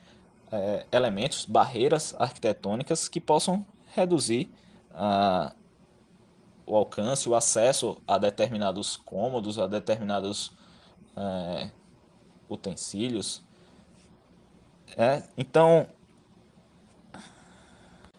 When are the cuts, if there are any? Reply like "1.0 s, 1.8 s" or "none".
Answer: none